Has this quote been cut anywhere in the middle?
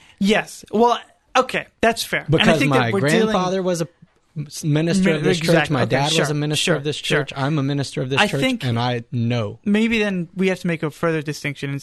no; 0 cuts

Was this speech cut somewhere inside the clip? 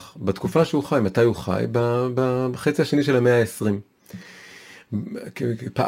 no; 0 cuts

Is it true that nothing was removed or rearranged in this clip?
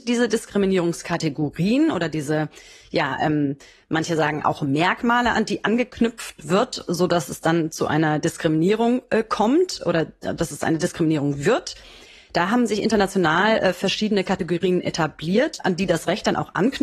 yes; 0 cuts

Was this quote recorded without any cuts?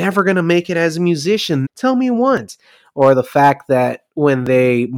no; 1 cut; at 1.6 s

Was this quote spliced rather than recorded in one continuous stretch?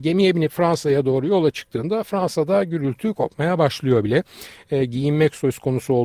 no; 0 cuts

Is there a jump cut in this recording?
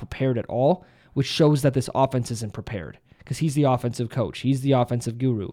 no; 0 cuts

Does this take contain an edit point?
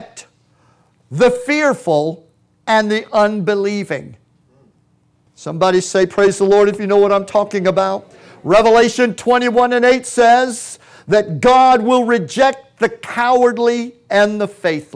yes; 1 cut; at 5.3 s

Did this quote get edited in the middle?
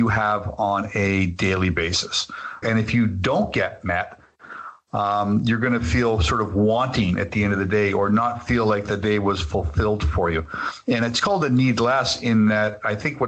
yes; 1 cut; at 2.6 s

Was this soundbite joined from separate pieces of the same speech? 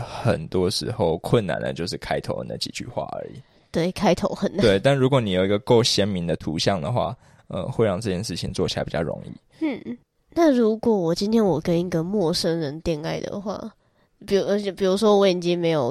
no; 0 cuts

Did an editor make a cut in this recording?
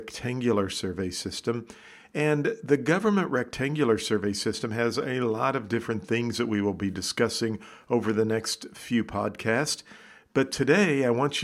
no; 0 cuts

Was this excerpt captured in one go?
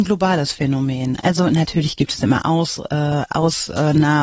yes; 0 cuts

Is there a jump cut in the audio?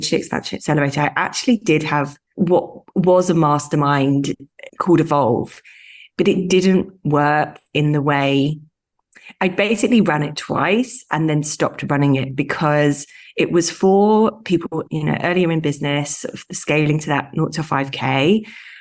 no; 0 cuts

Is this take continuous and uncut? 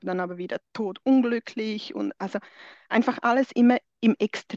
yes; 0 cuts

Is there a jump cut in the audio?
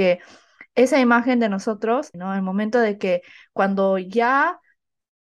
yes; 1 cut; at 2.1 s

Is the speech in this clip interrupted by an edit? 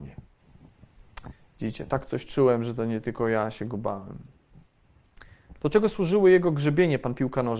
yes; 1 cut; at 5.6 s

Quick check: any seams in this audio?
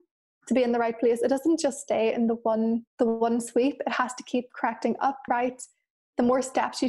yes; 2 cuts; at 2.9 s, 5.3 s

